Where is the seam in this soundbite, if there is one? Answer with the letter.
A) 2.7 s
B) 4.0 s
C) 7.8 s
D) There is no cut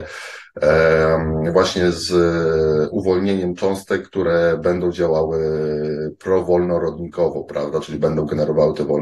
D